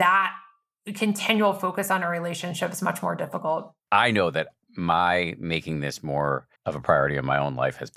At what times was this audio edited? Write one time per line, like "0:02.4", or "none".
0:03.8
0:06.6